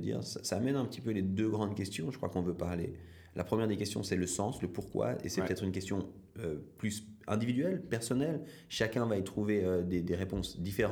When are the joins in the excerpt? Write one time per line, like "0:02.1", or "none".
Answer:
none